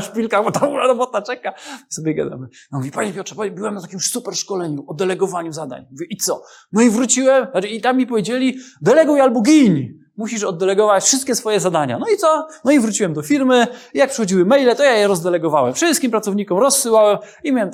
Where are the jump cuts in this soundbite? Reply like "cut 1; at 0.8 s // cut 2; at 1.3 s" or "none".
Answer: none